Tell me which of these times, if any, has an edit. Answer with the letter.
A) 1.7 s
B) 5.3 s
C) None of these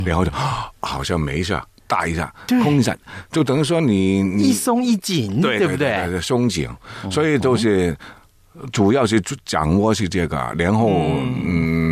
A